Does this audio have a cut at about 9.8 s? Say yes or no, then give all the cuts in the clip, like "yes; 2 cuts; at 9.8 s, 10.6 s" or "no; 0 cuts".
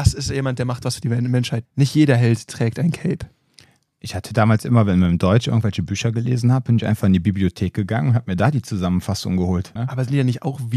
yes; 2 cuts; at 1.6 s, 9.8 s